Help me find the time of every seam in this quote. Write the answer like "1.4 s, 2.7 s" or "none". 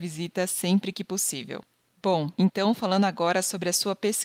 none